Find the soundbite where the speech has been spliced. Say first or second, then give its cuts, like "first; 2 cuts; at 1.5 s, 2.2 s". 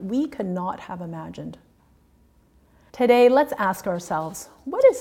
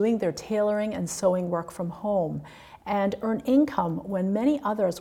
first; 1 cut; at 2.9 s